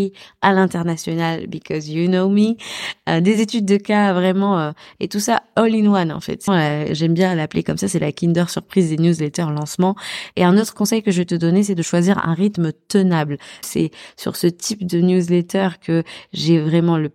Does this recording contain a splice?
yes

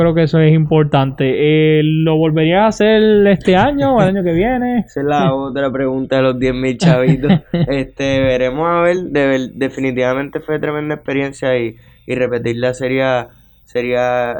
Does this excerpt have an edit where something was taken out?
no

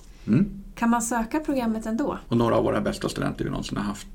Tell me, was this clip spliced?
yes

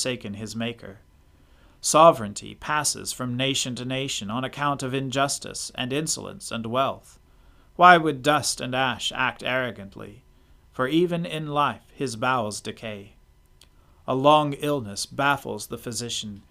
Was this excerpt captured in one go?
no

